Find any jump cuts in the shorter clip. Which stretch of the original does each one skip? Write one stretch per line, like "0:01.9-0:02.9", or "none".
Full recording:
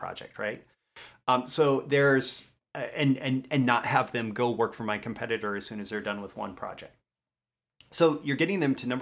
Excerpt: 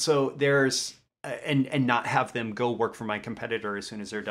0:03.2-0:03.5

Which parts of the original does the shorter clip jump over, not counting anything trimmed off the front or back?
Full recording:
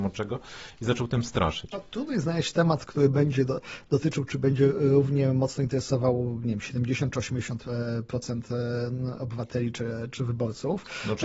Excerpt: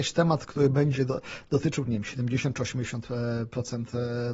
0:04.2-0:06.4

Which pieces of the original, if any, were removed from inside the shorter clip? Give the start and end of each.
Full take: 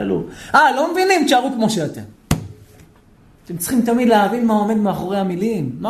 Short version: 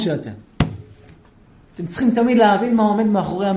none

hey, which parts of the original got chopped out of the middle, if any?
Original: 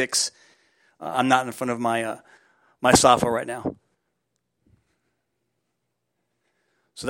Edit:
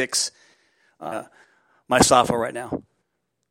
0:01.1-0:02.0

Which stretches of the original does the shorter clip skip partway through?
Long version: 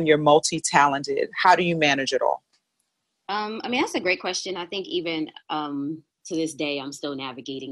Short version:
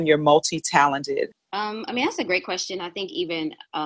0:01.3-0:03.1

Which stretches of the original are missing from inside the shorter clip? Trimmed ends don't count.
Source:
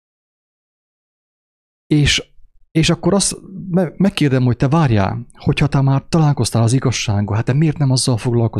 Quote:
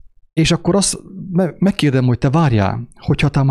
none

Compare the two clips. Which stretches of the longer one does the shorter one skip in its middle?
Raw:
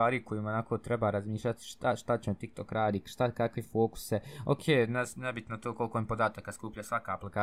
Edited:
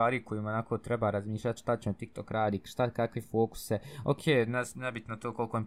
0:01.6-0:02.0

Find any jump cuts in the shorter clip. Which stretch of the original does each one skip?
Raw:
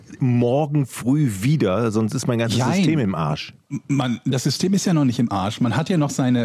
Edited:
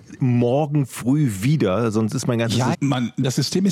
0:02.7-0:03.8

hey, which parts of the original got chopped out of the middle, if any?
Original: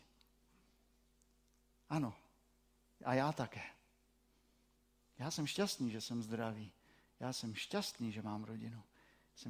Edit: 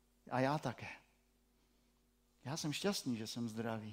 none

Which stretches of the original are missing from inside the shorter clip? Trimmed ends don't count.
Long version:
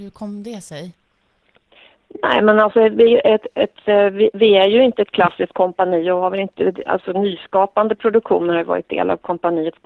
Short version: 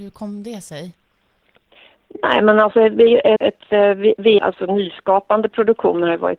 0:03.4-0:03.5
0:04.5-0:06.8

